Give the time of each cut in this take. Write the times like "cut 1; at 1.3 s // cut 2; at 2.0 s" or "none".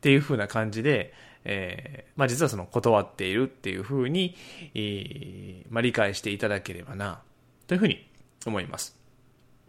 cut 1; at 2.1 s